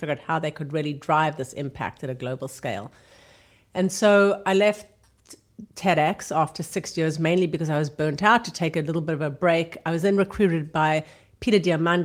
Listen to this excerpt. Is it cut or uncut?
uncut